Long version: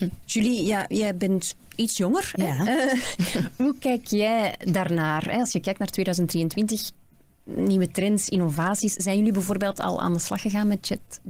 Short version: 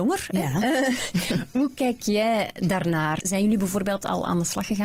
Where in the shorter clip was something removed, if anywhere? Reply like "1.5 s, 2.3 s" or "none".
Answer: 3.2 s